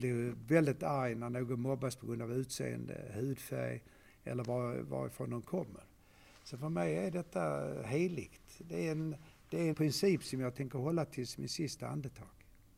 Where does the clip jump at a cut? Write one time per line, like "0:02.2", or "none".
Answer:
0:09.7